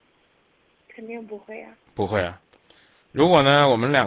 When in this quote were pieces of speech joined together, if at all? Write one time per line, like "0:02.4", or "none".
none